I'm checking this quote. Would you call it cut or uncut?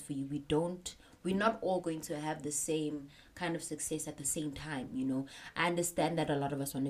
uncut